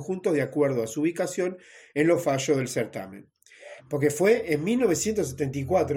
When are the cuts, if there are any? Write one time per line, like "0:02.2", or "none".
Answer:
0:03.8